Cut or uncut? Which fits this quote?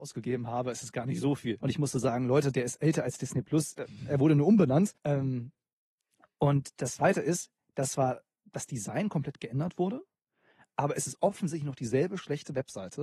cut